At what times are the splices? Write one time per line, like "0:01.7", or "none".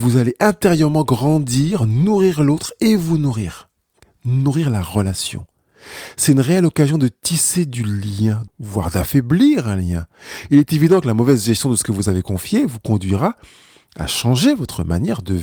0:08.5